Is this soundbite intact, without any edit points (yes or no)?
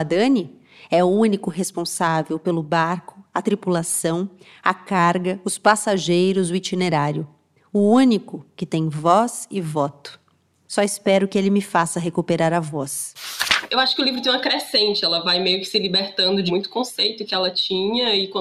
no